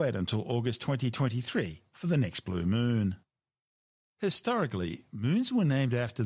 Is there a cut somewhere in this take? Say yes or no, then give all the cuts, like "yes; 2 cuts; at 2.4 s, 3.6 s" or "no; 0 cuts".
no; 0 cuts